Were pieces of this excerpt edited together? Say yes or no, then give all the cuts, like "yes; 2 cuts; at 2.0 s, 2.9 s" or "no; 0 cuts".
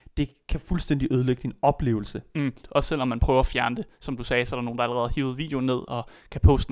yes; 1 cut; at 2.6 s